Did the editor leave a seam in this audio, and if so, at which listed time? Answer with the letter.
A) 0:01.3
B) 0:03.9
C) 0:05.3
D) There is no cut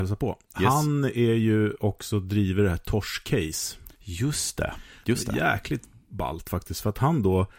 B